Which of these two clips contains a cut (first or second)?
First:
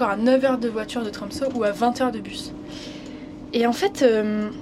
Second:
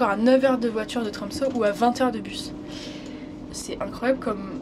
second